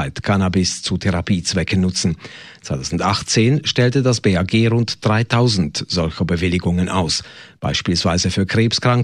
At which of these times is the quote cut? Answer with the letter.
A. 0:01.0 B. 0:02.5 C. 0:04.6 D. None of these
D